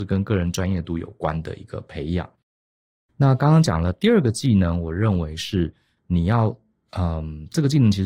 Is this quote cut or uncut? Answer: uncut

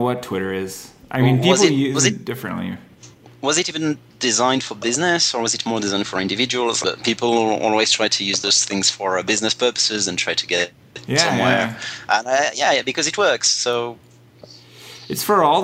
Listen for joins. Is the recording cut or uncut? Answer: cut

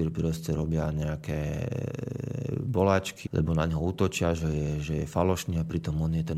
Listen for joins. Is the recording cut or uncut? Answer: cut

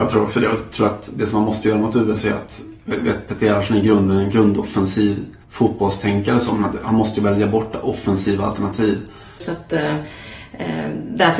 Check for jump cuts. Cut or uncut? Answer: cut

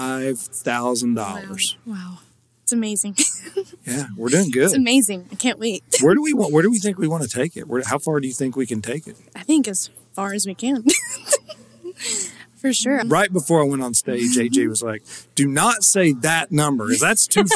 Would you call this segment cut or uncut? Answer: cut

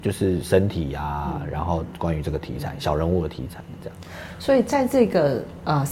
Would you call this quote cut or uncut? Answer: uncut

